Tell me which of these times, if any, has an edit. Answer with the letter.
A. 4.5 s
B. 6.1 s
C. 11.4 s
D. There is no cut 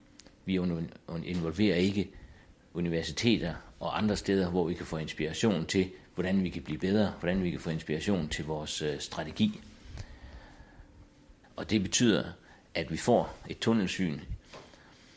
C